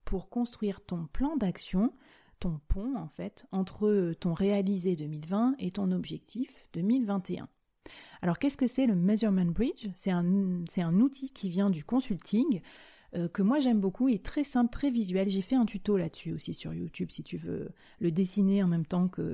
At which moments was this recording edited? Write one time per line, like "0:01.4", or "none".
none